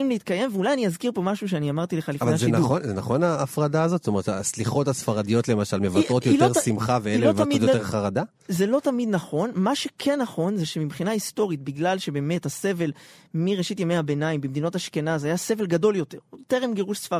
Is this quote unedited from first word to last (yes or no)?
yes